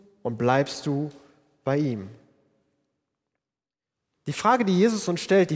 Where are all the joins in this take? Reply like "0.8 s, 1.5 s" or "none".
4.1 s